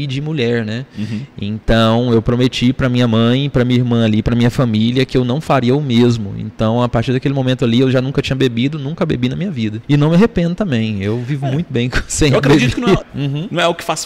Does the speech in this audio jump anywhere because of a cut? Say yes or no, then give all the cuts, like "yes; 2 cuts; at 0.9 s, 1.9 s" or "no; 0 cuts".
yes; 2 cuts; at 9.8 s, 13.0 s